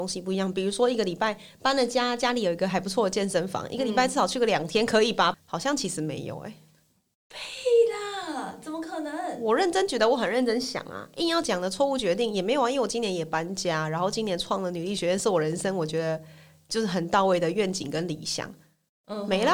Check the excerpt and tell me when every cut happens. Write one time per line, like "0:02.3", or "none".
0:05.3

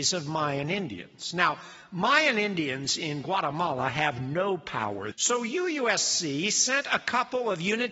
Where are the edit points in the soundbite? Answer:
0:05.1

